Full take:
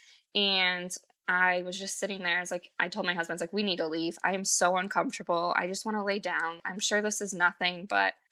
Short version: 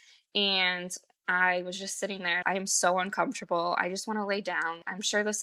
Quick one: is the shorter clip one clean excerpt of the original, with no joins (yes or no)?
no